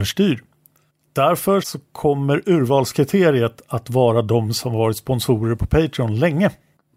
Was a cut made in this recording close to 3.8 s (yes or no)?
no